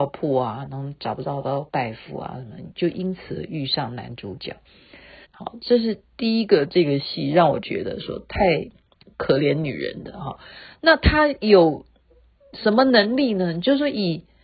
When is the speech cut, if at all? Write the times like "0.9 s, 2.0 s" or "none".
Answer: 5.2 s